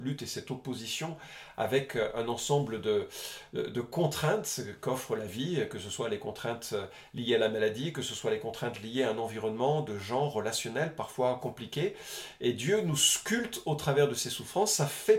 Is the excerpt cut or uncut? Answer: uncut